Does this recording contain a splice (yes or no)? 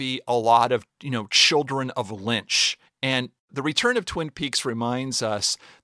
yes